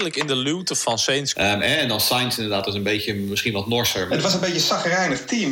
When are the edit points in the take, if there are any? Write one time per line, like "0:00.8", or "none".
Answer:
0:01.3
0:04.1

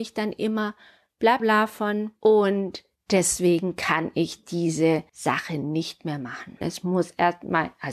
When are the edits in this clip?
0:01.4
0:06.6

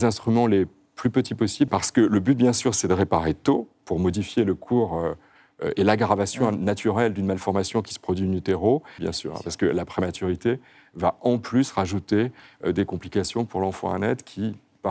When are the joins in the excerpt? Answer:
0:01.7
0:09.0

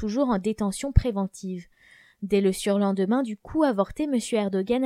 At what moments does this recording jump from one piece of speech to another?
none

